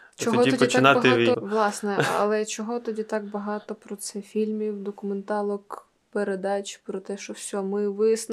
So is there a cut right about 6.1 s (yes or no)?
no